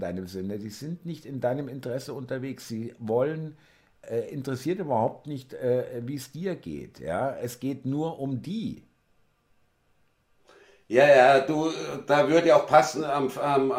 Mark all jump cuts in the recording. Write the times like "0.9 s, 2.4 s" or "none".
none